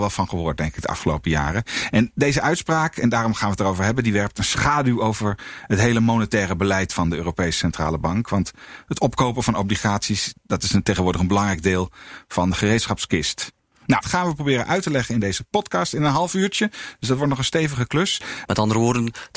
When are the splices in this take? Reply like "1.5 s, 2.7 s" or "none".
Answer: 14.0 s, 18.5 s

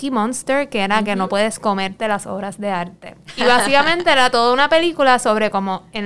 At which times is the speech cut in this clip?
none

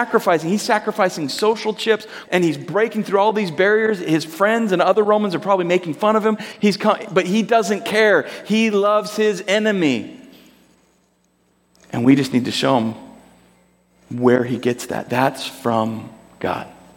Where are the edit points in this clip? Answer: 2.3 s

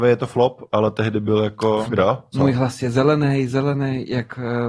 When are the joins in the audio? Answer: 1.9 s

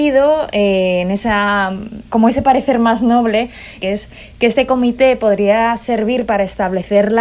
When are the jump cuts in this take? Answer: 2.1 s, 3.8 s

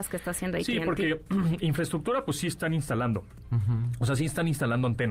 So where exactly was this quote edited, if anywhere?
none

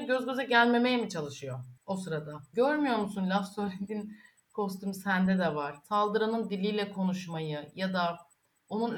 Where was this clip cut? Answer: 2.5 s, 5.8 s

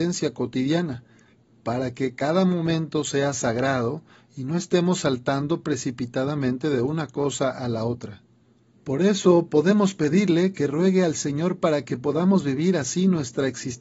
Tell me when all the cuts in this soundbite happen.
8.7 s

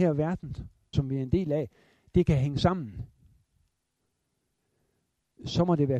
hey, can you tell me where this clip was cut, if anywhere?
0.9 s

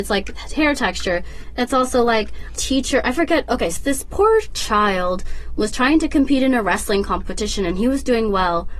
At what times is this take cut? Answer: 2.6 s, 3.8 s

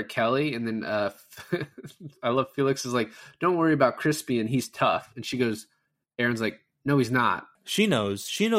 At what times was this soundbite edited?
7.6 s

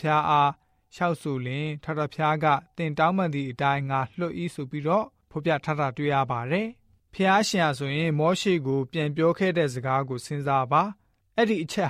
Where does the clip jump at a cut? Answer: none

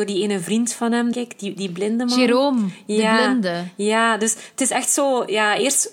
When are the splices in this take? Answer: 1.1 s

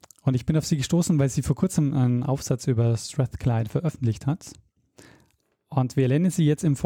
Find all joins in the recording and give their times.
none

